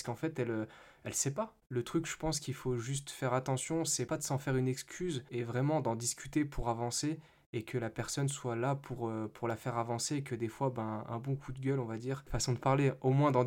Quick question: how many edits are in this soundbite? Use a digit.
1